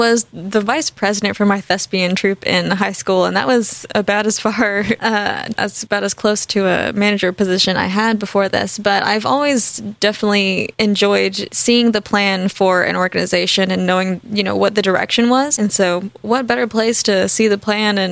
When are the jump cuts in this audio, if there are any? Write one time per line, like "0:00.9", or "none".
0:05.6